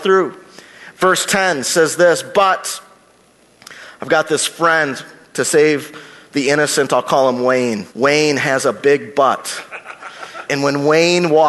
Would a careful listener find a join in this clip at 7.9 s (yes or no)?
yes